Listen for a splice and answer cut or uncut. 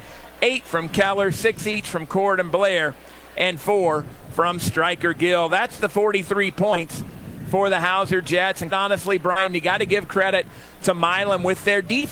cut